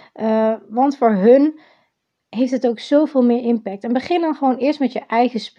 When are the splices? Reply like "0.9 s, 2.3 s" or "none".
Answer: none

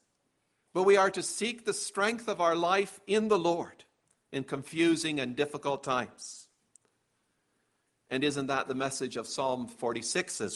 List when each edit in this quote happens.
none

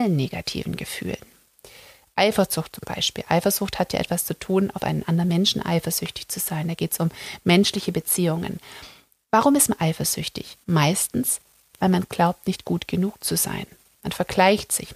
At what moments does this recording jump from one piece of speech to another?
10.6 s

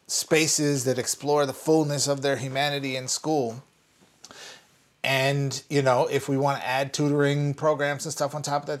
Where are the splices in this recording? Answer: none

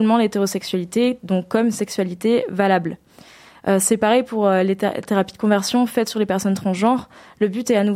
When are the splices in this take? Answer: none

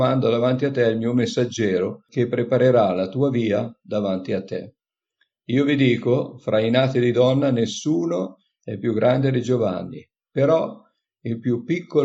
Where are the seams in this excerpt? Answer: none

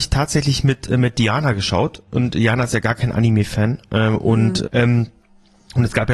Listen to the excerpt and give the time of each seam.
4.6 s

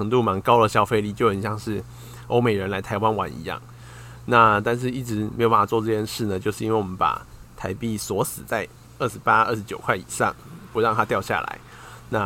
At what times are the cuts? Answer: none

